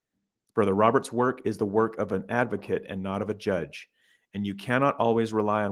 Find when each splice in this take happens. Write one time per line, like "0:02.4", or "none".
none